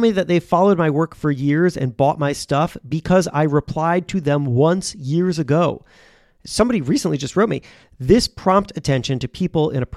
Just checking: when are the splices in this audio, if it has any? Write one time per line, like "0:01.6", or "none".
none